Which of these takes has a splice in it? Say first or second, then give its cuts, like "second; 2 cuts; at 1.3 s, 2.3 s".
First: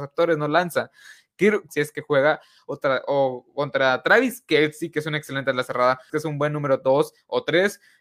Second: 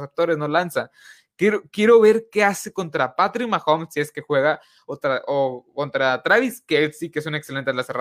first; 2 cuts; at 1.7 s, 6.1 s